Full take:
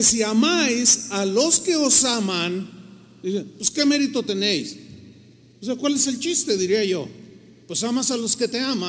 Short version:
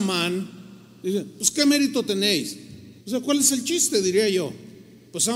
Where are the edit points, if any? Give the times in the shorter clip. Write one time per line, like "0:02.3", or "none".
0:03.0